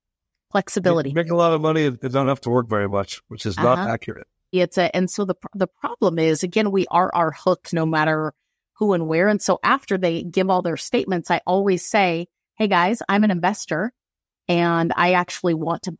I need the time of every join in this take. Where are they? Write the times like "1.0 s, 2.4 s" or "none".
4.5 s